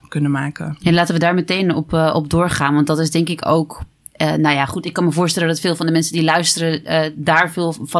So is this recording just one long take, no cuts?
yes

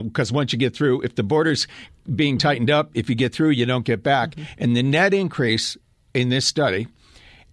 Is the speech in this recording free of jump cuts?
yes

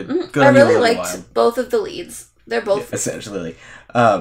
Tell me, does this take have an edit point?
yes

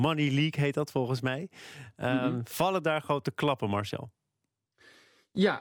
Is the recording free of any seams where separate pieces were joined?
yes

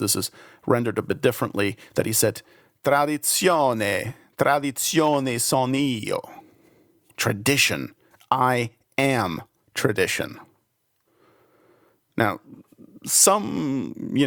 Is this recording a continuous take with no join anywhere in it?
yes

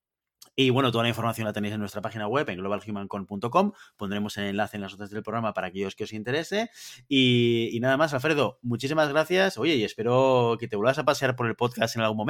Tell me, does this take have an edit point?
no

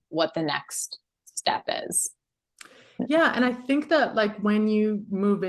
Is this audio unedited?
yes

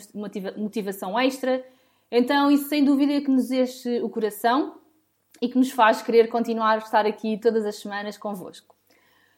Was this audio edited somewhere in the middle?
no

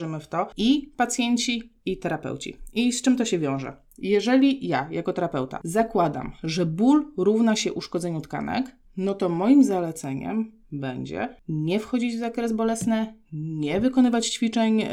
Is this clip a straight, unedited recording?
yes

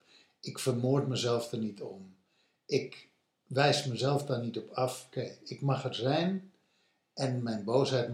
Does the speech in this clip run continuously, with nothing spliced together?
no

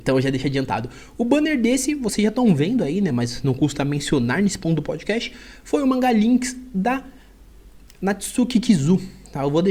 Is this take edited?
no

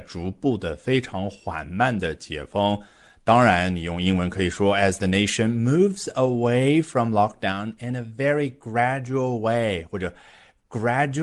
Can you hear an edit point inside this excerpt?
no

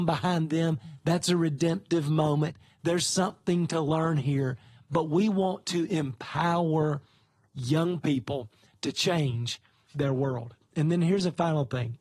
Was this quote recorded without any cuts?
yes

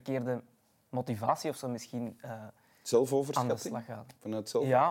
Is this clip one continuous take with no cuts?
yes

